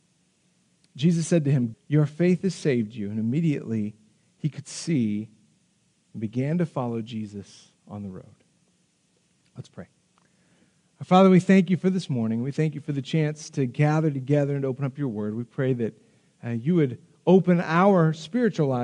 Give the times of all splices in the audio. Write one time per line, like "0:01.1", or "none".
0:01.7